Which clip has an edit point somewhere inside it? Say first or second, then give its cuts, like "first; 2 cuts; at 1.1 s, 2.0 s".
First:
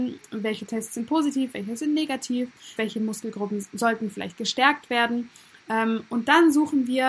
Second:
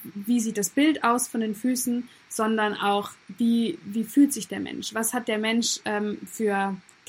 first; 1 cut; at 2.8 s